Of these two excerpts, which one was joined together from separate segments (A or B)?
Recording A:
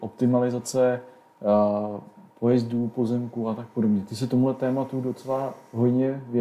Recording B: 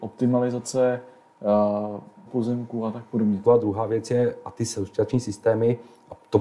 B